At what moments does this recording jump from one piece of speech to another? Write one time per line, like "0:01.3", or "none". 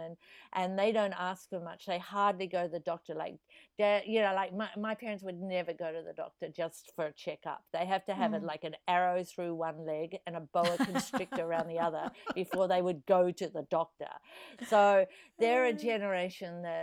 none